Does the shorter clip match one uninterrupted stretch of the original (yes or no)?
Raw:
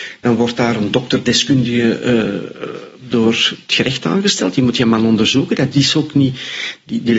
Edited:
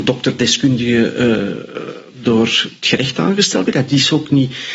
no